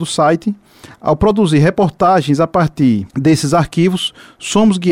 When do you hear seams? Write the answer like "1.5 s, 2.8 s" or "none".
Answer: 0.9 s, 3.1 s